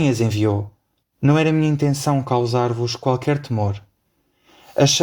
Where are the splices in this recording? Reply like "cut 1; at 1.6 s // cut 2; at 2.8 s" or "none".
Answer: cut 1; at 1.0 s